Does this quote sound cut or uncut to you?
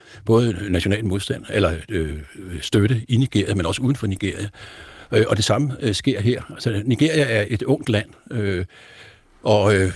cut